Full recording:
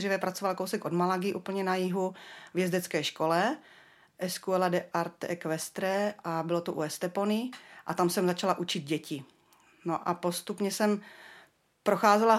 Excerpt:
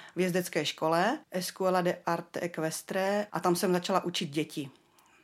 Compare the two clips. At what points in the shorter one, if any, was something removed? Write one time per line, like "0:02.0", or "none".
0:01.2
0:03.3